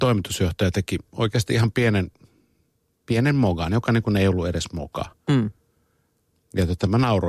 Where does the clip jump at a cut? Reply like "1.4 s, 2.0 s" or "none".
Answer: none